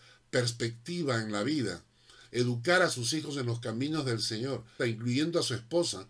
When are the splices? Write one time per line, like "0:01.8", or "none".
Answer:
0:04.8